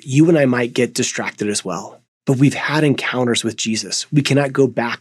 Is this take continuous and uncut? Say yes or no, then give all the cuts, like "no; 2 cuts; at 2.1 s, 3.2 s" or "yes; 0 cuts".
yes; 0 cuts